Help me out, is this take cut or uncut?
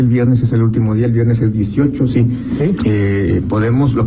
cut